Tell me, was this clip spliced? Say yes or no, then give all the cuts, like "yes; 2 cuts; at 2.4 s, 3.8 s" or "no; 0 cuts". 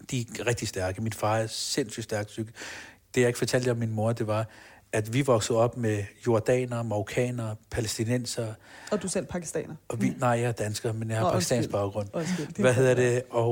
no; 0 cuts